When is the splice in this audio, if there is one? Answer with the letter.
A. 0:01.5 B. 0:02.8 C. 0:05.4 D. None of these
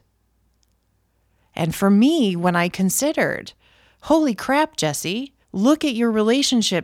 C